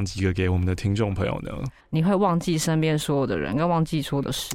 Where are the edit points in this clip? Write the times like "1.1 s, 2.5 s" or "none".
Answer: 1.8 s